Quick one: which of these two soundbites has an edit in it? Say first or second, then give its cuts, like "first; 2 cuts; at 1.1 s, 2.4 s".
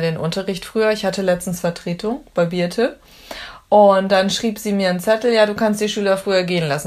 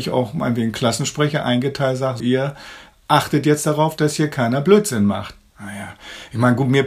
second; 2 cuts; at 2.2 s, 5.5 s